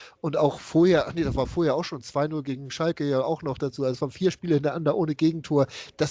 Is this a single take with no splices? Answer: yes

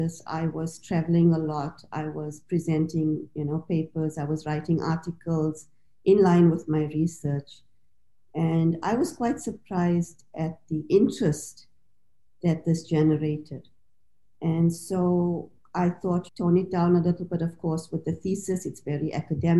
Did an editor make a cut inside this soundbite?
yes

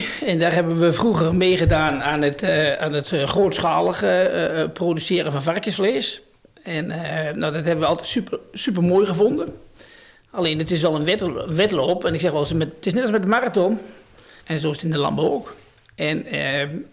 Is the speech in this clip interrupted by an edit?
yes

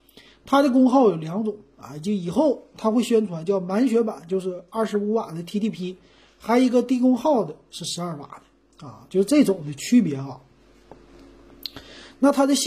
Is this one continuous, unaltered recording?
yes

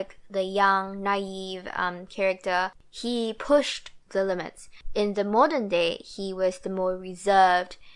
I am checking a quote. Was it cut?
no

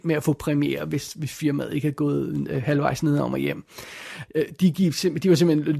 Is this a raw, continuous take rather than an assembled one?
no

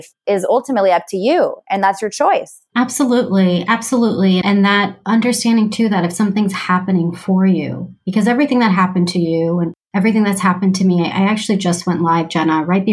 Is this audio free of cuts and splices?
yes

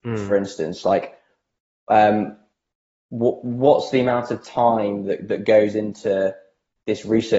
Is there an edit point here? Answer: no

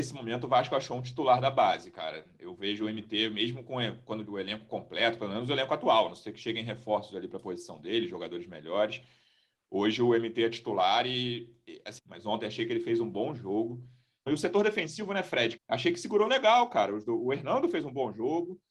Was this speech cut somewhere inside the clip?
yes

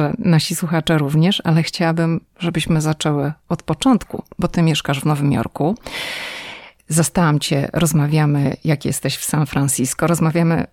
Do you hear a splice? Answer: no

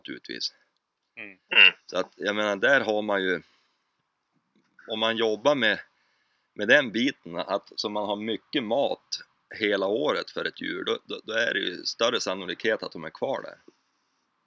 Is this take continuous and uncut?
yes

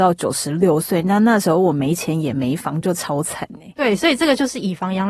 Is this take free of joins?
yes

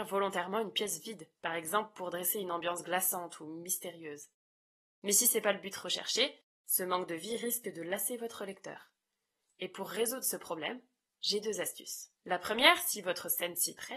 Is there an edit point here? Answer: yes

